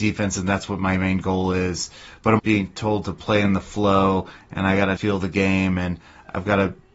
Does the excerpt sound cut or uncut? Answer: cut